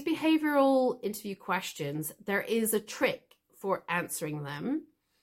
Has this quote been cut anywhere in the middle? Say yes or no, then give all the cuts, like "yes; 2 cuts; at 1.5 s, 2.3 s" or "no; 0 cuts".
no; 0 cuts